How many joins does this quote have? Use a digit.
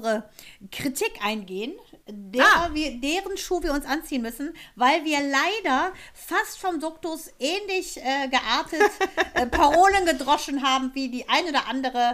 0